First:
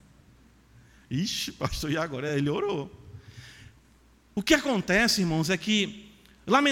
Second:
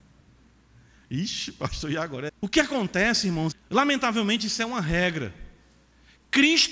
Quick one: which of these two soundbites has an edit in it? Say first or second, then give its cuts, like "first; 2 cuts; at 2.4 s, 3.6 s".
second; 2 cuts; at 2.3 s, 3.5 s